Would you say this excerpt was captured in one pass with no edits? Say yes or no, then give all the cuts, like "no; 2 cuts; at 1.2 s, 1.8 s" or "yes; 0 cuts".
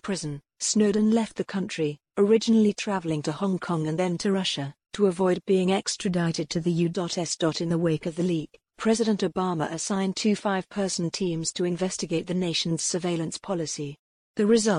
yes; 0 cuts